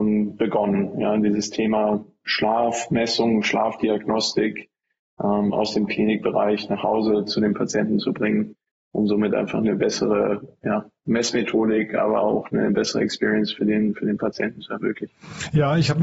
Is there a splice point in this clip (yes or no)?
no